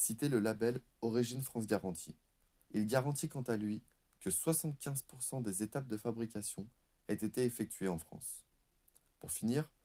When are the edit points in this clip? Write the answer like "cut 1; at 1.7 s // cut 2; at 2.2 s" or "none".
cut 1; at 2.6 s